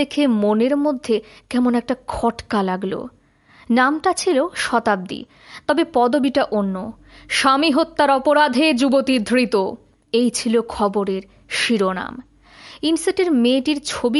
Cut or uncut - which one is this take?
uncut